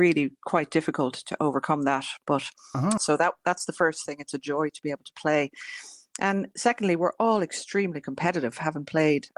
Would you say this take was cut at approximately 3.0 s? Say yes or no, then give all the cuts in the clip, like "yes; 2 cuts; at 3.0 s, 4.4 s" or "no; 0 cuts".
yes; 1 cut; at 3.0 s